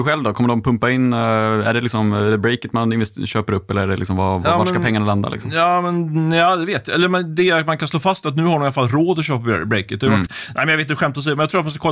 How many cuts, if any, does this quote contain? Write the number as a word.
one